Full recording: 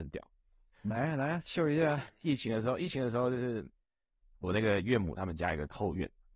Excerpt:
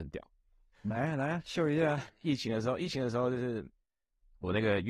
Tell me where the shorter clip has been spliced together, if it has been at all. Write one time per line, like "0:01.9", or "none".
none